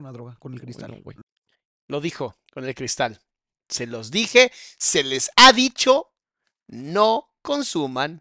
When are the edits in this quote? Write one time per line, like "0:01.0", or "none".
none